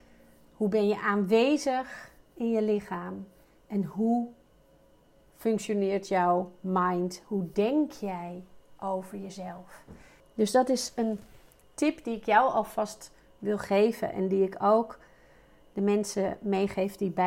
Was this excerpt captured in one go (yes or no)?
no